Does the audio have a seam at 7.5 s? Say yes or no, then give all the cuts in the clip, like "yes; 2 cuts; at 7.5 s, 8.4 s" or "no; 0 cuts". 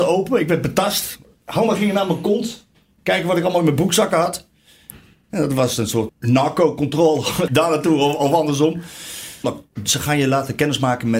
yes; 3 cuts; at 6.1 s, 7.5 s, 9.4 s